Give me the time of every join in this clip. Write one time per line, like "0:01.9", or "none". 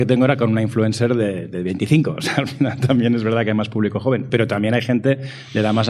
none